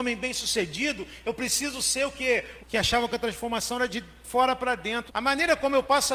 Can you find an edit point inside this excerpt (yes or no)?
yes